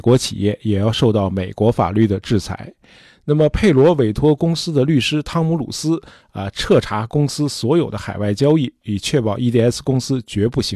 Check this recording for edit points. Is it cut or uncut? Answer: uncut